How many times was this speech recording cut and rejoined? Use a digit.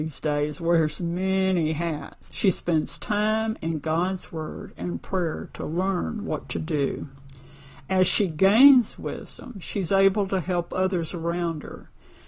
1